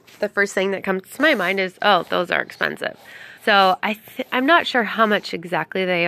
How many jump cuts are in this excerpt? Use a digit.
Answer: 1